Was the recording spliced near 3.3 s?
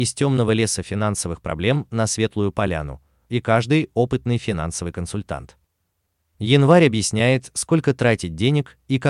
yes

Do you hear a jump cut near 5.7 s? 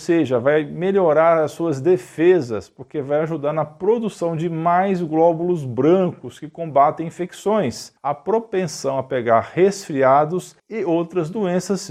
no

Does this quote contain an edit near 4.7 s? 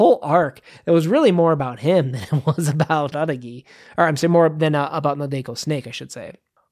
no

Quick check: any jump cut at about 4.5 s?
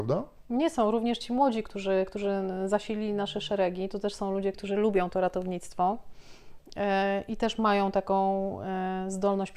yes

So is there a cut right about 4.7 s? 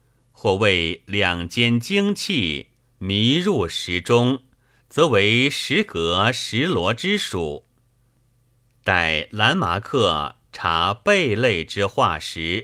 no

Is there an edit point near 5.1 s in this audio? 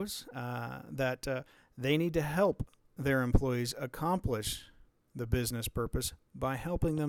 no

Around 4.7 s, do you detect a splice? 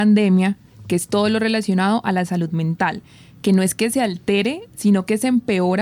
no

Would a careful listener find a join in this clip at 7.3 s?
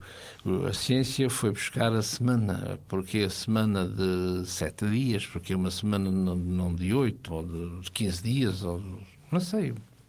yes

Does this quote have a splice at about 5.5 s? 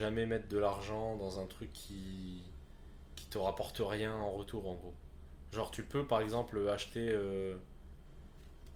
no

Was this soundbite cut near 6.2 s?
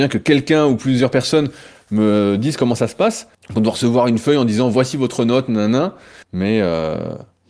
yes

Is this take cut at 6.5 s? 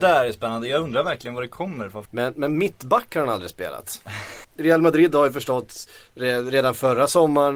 no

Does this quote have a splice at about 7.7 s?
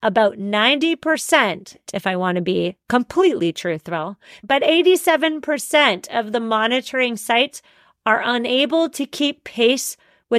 no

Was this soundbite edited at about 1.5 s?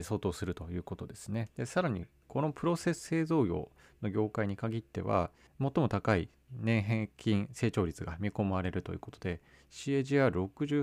yes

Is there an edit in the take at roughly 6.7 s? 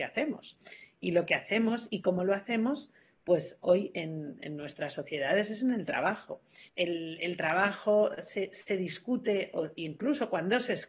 yes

